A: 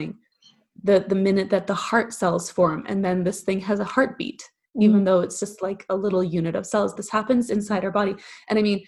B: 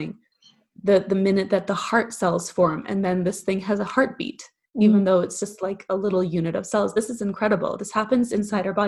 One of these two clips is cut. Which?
A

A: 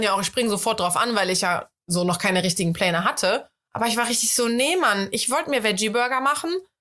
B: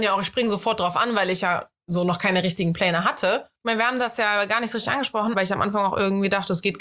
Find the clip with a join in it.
B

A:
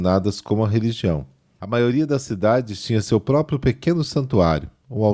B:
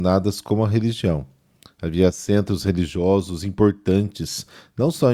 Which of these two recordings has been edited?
A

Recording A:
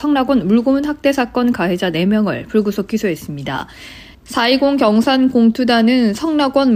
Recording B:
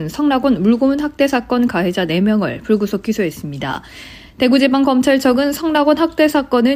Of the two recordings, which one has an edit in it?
A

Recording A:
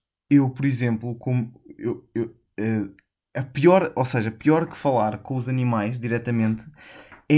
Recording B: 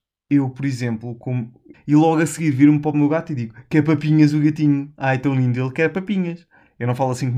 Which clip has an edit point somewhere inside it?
B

